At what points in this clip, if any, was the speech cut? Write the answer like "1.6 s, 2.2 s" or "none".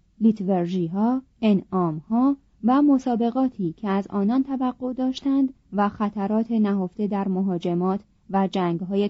1.3 s, 5.6 s